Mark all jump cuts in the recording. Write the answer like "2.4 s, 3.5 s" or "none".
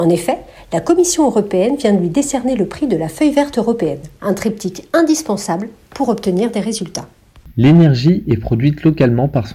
4.2 s, 7.5 s

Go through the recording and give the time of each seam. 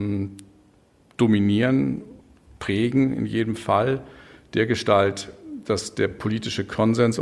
none

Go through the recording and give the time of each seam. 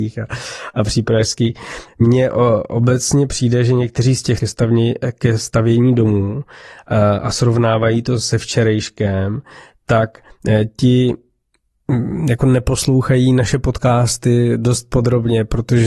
1.9 s, 4.4 s

